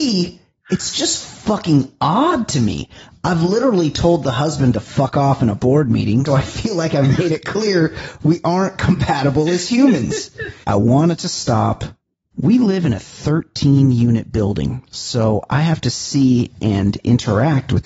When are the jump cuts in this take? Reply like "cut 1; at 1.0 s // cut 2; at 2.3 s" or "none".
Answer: cut 1; at 6.3 s // cut 2; at 10.6 s // cut 3; at 12.3 s